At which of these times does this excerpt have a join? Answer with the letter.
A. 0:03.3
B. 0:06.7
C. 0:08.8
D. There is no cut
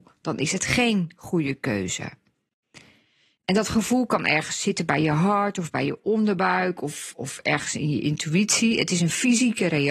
D